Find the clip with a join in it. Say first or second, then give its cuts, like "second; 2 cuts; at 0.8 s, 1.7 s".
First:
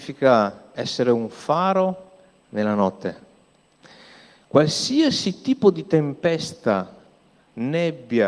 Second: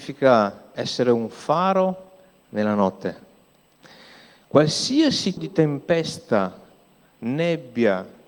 second; 1 cut; at 5.4 s